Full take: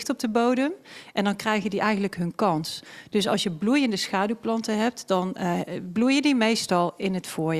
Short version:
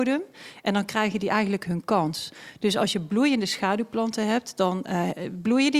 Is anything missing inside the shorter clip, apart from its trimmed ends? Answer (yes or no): no